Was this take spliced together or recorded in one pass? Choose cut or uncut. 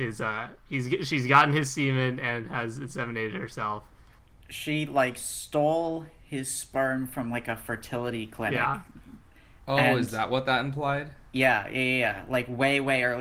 uncut